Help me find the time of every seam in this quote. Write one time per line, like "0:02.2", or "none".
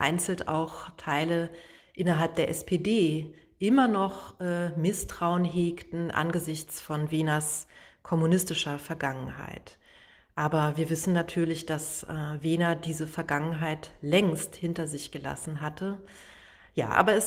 none